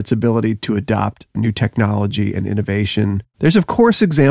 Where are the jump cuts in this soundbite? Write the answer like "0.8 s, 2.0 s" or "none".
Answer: 3.3 s